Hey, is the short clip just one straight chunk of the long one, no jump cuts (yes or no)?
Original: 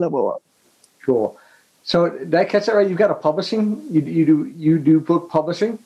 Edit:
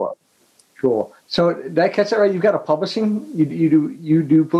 no